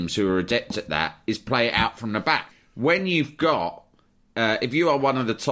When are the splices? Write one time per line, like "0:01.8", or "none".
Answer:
0:02.5